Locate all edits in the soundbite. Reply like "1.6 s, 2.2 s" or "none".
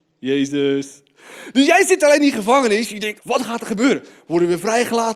3.2 s